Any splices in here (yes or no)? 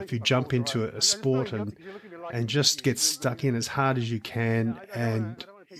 no